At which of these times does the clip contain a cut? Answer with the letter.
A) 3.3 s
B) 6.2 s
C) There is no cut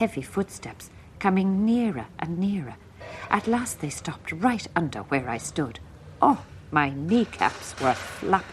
C